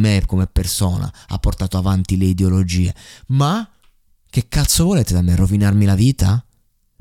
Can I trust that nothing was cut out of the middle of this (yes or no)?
yes